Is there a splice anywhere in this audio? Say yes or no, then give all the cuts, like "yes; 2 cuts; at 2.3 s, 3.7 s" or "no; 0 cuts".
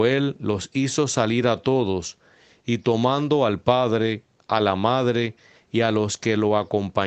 no; 0 cuts